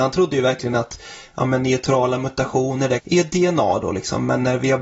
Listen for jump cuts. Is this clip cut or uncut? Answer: cut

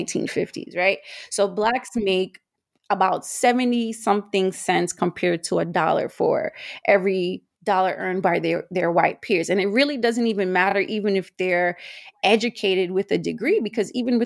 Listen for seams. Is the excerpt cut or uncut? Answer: uncut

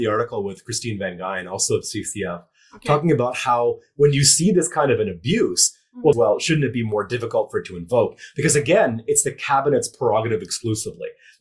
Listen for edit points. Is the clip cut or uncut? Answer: cut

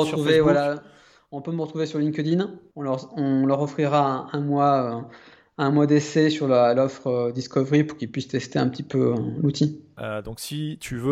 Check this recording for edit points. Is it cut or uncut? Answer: cut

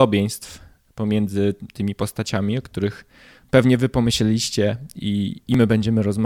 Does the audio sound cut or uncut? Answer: uncut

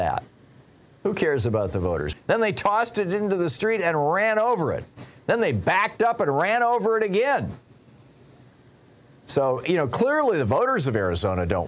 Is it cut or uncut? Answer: cut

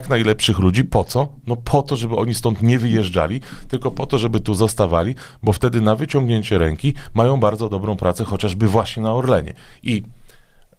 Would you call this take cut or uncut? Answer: uncut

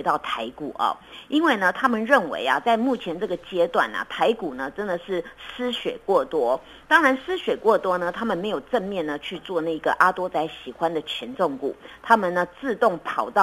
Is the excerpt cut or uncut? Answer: uncut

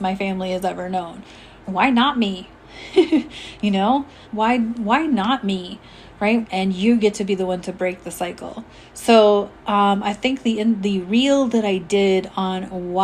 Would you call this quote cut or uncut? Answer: cut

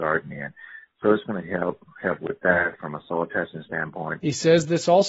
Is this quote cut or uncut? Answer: uncut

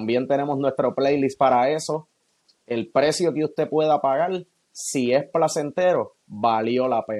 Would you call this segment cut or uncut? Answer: cut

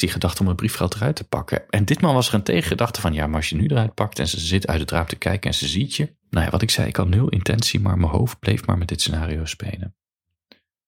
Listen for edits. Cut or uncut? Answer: cut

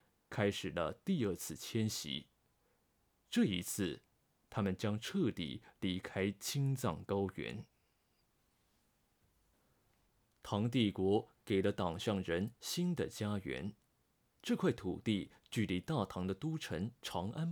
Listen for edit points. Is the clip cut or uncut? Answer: uncut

